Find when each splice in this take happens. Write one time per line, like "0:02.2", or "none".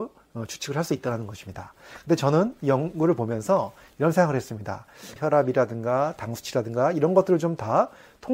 0:05.2